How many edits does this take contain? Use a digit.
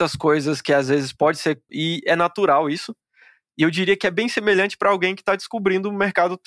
1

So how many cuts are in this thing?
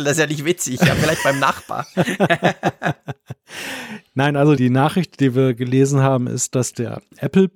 1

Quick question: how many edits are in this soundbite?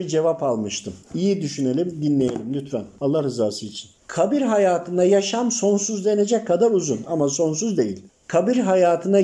1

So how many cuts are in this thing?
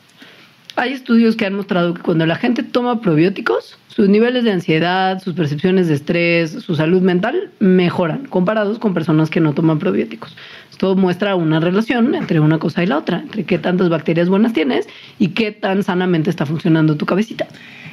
0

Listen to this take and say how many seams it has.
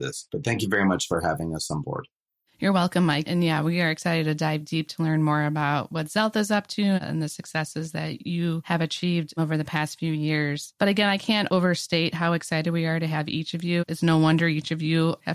0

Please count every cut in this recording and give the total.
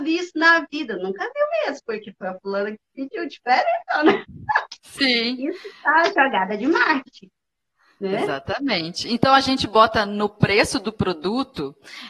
0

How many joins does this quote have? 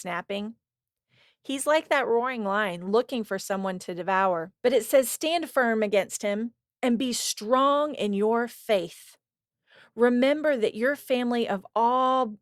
1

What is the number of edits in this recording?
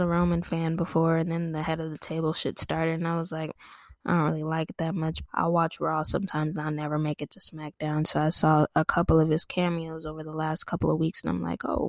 2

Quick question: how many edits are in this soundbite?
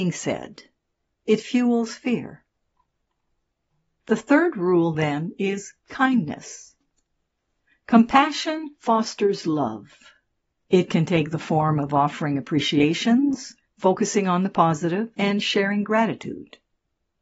2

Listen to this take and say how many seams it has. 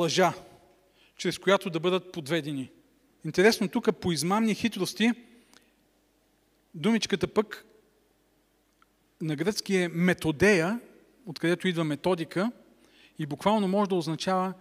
1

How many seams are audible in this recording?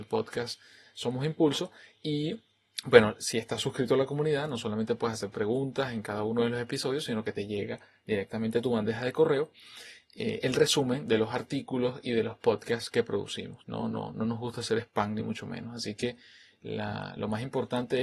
1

